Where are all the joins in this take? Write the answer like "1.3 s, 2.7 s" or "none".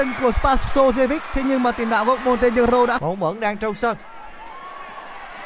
3.0 s